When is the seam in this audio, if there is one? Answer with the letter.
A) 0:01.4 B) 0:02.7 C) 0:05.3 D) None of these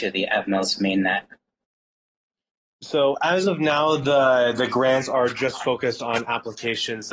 D